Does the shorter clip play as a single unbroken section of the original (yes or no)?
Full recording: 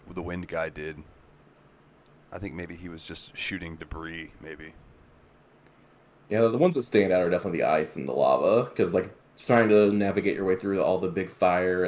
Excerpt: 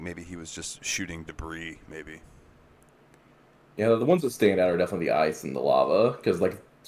yes